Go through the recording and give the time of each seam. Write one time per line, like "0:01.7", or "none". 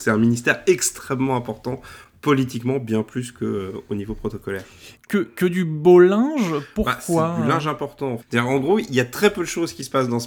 0:05.0
0:08.2

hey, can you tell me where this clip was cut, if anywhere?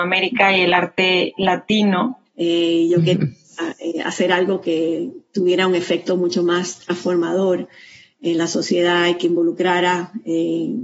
0:02.3

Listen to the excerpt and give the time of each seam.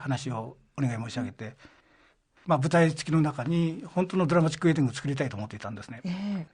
none

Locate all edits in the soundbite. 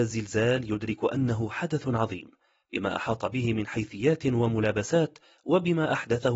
none

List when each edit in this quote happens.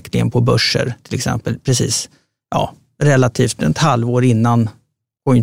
none

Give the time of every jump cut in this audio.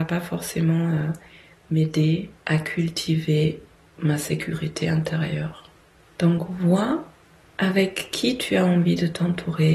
0:02.4

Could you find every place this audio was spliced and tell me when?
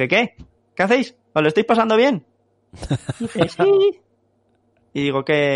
none

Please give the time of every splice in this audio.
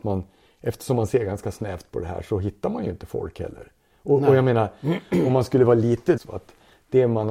0:06.2

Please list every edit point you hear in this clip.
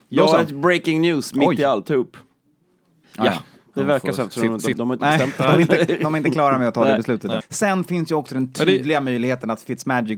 0:03.0
0:04.7
0:07.4

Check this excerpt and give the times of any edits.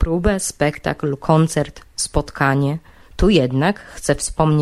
0:03.0

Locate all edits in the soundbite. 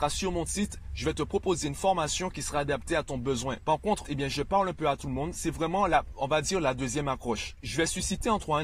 0:04.0

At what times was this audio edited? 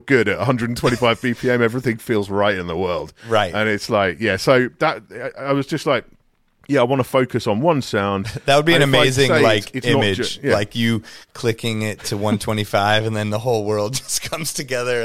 none

